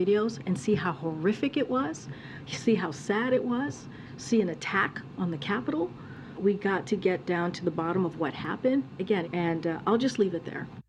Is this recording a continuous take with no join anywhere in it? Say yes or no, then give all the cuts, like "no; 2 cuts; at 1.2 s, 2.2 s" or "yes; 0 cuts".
no; 2 cuts; at 6.3 s, 9.2 s